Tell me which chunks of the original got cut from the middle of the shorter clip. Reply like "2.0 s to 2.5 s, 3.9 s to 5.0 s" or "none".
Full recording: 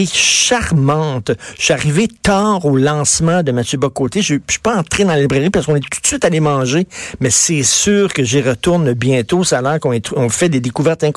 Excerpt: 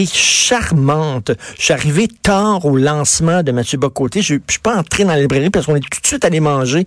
none